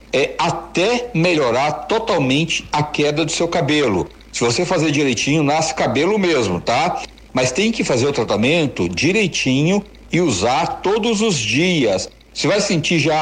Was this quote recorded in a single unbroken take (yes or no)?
yes